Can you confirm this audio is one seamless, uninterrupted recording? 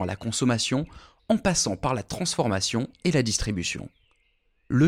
yes; 0 cuts

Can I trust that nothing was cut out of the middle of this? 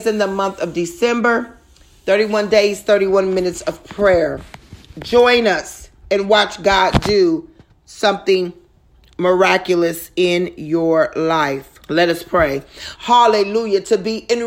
no; 2 cuts; at 11.8 s, 13.0 s

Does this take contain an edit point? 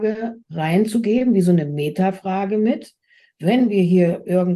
no; 0 cuts

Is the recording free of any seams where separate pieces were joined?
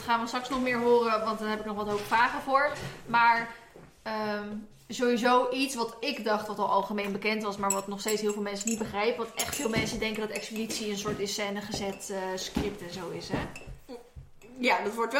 yes; 0 cuts

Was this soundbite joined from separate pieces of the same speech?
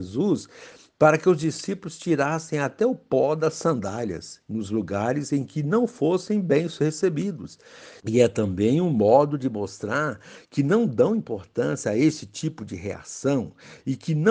yes; 1 cut; at 8.0 s

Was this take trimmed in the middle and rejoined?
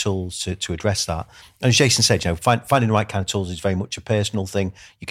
no; 0 cuts

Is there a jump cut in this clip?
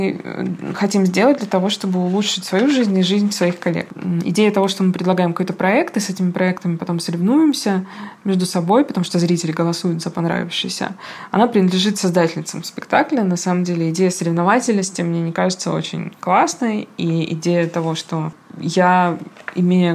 no; 0 cuts

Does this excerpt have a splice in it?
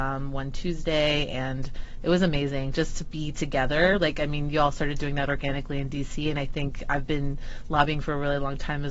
no; 0 cuts

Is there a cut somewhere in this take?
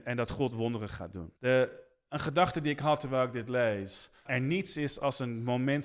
yes; 2 cuts; at 1.4 s, 4.3 s

